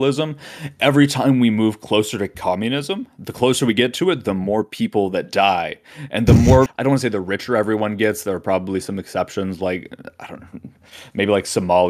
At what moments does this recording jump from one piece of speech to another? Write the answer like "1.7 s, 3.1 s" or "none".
6.7 s